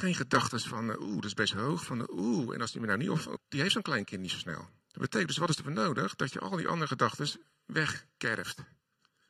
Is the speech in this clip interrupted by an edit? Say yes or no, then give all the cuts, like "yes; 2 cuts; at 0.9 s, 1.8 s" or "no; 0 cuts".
yes; 2 cuts; at 3.4 s, 4.8 s